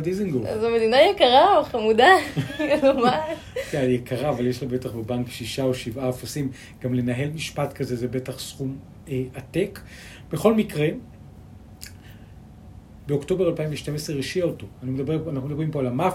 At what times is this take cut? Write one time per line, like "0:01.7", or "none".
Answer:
none